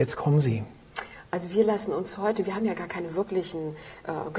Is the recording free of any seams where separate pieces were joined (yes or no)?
no